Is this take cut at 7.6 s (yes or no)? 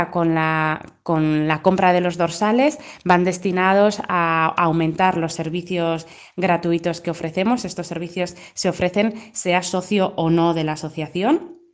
no